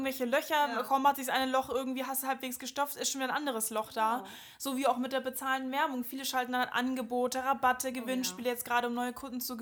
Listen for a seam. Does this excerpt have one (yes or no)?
no